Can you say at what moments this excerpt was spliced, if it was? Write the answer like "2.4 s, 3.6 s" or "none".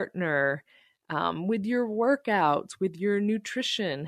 none